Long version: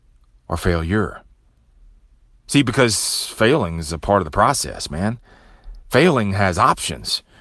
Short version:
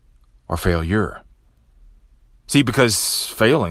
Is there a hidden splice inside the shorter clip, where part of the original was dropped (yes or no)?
no